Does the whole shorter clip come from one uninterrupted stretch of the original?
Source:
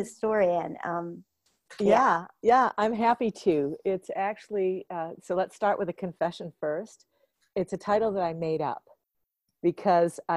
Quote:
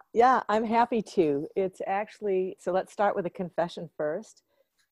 no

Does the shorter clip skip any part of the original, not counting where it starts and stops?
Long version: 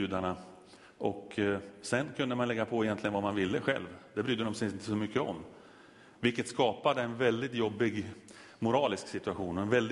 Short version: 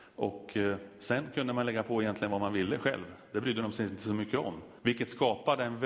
yes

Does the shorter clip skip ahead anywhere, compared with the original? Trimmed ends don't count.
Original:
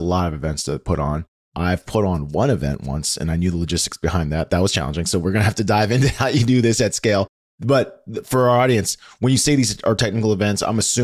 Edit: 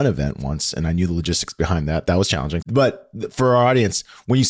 yes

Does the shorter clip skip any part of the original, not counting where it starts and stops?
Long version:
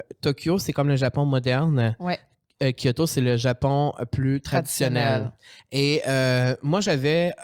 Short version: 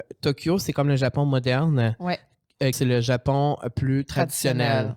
yes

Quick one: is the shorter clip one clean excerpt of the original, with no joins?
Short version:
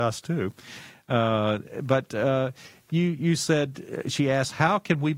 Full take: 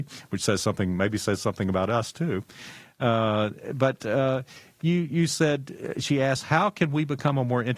yes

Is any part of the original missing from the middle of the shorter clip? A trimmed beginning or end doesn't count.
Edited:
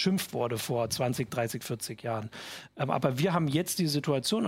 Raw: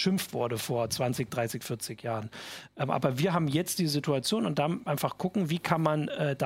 no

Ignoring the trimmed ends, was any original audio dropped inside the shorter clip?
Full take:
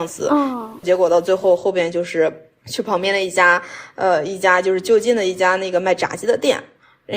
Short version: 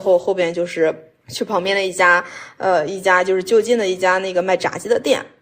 no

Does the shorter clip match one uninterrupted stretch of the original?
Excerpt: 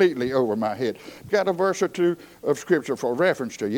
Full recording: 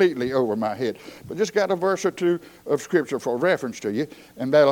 no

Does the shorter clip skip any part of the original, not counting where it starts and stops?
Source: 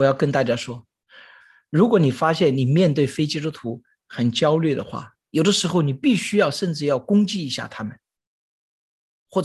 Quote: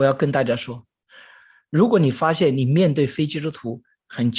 no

